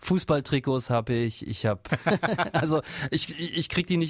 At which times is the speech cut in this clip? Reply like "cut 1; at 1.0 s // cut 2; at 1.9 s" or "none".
cut 1; at 1.9 s